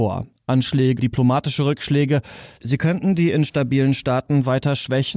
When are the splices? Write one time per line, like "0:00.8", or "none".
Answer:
0:01.0
0:02.6